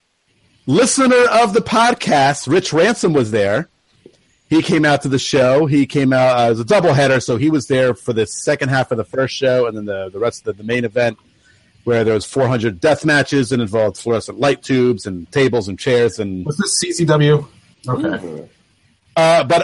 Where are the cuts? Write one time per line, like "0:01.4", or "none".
0:17.7